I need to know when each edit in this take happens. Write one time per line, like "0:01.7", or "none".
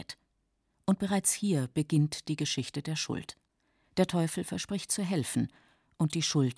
0:03.8